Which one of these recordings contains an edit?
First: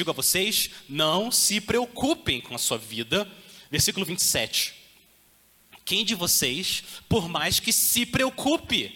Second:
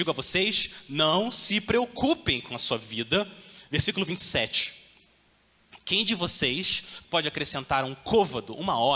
second; 1 cut; at 7.0 s

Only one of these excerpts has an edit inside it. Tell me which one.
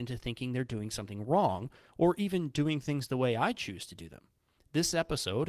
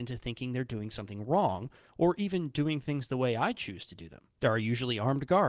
second; 1 cut; at 4.4 s

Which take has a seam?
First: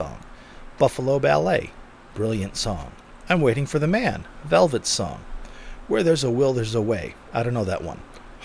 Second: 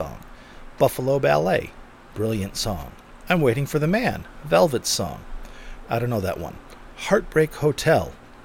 second; 1 cut; at 5.8 s

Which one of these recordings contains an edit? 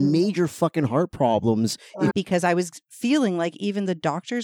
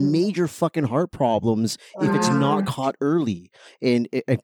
first; 1 cut; at 2.1 s

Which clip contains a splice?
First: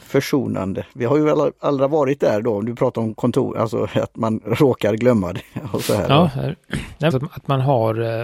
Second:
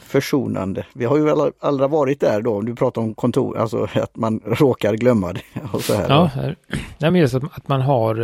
first; 1 cut; at 7.1 s

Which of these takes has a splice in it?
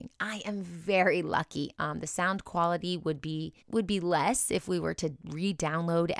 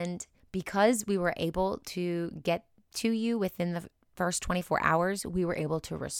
first; 2 cuts; at 1.7 s, 3.6 s

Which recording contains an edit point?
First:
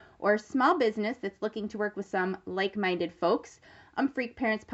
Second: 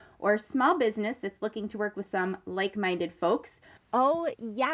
second; 1 cut; at 3.8 s

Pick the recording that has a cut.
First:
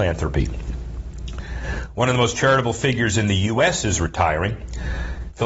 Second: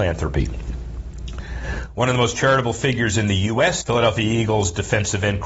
second; 1 cut; at 3.8 s

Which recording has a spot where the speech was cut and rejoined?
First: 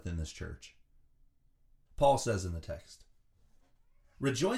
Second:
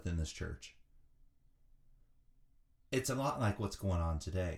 first; 1 cut; at 1.9 s

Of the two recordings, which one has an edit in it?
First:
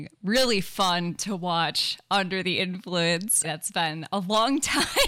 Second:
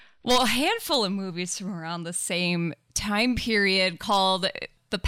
first; 1 cut; at 3.4 s

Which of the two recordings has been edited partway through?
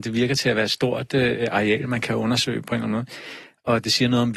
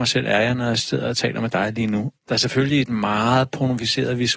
second; 1 cut; at 2.2 s

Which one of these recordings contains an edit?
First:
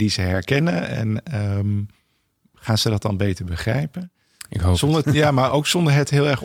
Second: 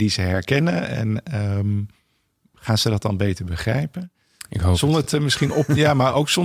first; 1 cut; at 5.0 s

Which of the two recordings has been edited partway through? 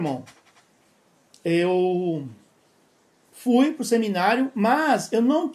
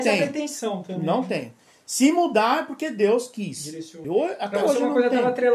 second; 1 cut; at 4.0 s

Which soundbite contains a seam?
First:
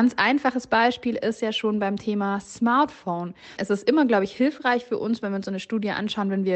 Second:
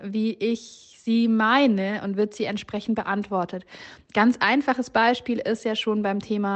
first; 1 cut; at 3.6 s

